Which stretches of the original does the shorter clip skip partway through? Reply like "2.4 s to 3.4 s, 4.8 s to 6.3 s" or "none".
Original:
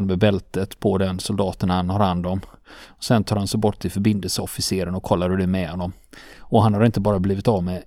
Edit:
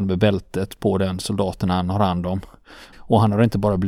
2.9 s to 6.3 s

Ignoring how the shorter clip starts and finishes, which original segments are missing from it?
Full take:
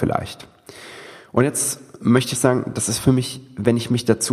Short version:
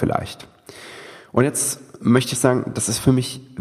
none

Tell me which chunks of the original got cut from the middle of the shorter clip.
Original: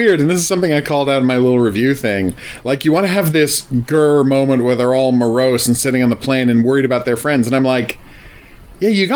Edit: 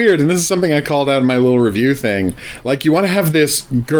none

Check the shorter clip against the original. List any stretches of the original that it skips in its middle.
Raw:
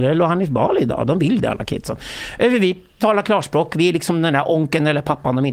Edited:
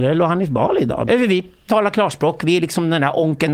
1.1 s to 2.4 s

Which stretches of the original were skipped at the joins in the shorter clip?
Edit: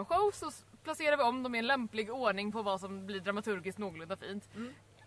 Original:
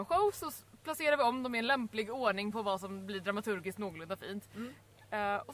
none

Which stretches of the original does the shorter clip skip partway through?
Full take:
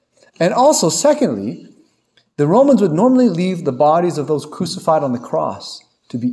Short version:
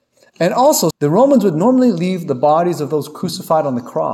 0.9 s to 2.3 s

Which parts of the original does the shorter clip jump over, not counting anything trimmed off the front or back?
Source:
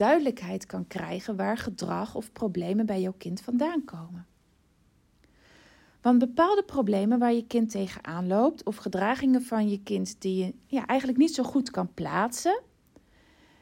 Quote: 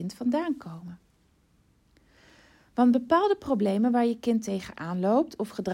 none

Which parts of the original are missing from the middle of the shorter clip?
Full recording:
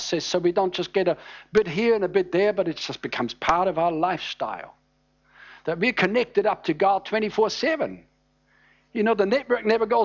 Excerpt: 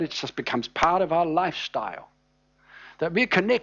none

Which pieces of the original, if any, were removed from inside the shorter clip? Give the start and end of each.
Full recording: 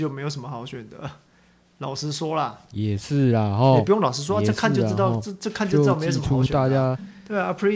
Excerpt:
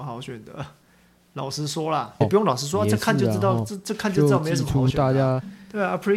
2.7 s to 3.8 s

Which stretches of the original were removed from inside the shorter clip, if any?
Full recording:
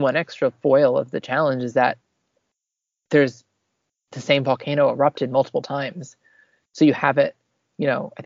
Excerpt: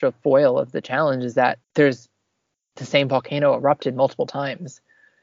2.0 s to 3.0 s

